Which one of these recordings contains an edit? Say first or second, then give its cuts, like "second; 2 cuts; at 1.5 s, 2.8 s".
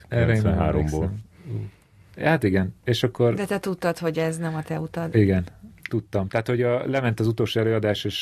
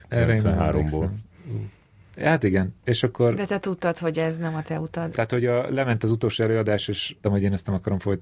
second; 2 cuts; at 5.1 s, 7.2 s